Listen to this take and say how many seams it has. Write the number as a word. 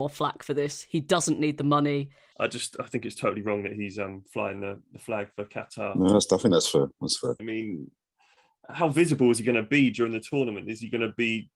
two